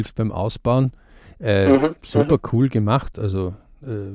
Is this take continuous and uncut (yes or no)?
yes